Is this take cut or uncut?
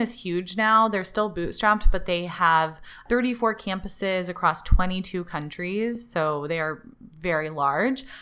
uncut